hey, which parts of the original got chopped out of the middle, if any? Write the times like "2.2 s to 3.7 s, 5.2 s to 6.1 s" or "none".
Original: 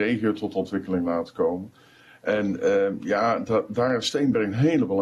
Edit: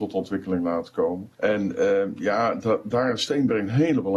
1.8 s to 2.2 s